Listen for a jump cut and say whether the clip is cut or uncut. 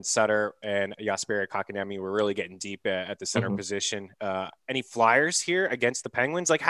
uncut